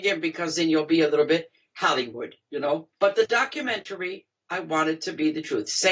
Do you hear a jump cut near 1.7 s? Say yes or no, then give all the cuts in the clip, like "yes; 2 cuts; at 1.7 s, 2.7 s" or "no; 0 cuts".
no; 1 cut; at 2.9 s